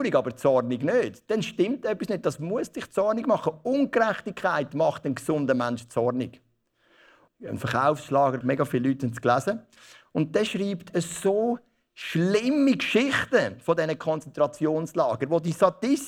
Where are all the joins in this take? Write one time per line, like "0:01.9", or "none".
0:07.3
0:08.4